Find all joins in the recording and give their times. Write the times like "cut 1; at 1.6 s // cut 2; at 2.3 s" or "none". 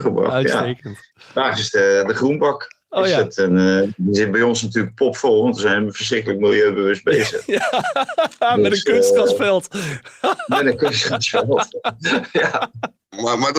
none